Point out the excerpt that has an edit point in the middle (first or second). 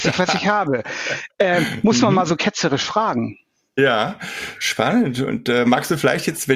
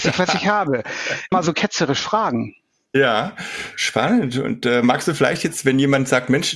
second